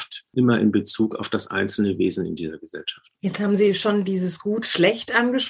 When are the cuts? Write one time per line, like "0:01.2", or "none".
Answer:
0:03.2